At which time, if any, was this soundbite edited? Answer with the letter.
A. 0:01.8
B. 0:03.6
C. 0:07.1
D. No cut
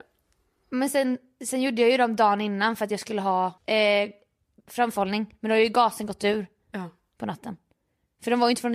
B